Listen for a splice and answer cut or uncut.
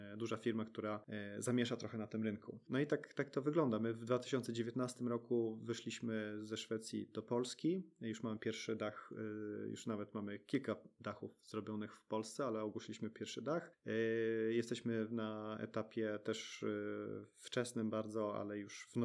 uncut